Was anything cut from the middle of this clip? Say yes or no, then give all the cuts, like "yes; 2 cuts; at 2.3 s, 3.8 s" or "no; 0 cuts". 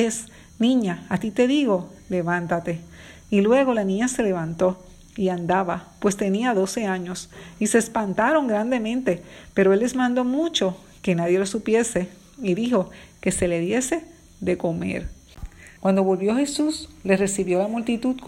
yes; 1 cut; at 15.8 s